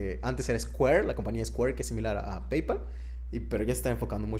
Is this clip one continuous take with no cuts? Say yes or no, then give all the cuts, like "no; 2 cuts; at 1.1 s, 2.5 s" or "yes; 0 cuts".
yes; 0 cuts